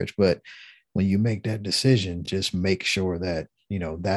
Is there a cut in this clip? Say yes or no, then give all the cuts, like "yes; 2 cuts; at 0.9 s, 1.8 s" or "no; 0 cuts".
no; 0 cuts